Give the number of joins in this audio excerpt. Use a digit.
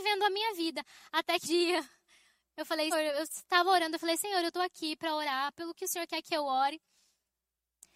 2